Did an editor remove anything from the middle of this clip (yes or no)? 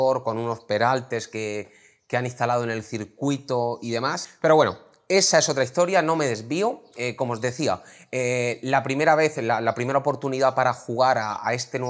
no